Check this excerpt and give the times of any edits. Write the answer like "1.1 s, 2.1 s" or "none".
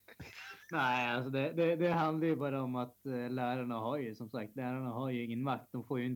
none